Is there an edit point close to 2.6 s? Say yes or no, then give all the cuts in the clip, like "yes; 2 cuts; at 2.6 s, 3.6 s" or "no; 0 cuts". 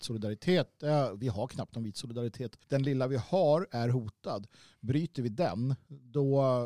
yes; 1 cut; at 2.6 s